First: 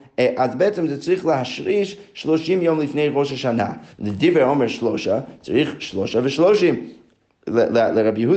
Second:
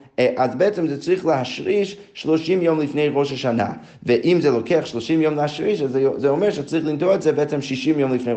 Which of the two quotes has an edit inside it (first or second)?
first